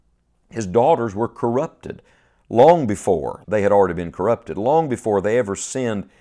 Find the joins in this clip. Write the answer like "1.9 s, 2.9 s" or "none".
3.4 s